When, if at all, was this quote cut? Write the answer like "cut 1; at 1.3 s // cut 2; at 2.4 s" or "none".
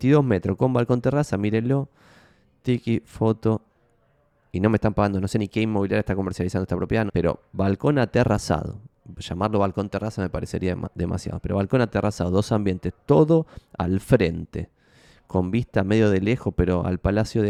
cut 1; at 7.1 s